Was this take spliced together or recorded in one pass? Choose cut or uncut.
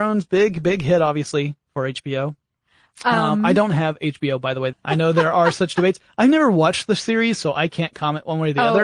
cut